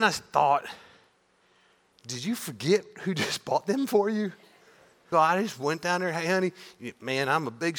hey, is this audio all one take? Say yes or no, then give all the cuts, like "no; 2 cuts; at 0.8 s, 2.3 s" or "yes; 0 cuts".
no; 1 cut; at 5.1 s